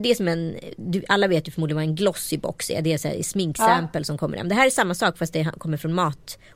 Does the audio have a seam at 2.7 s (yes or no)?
no